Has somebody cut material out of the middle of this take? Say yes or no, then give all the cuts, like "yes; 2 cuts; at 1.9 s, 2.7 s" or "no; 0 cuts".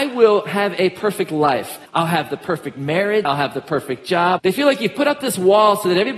yes; 3 cuts; at 1.9 s, 3.2 s, 4.4 s